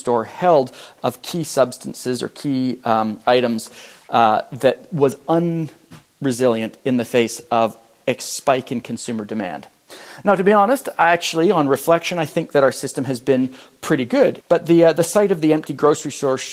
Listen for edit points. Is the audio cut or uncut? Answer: cut